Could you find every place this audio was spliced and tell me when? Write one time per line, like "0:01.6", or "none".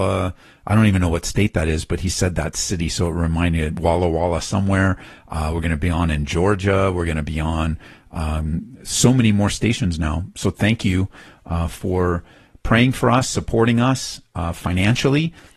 none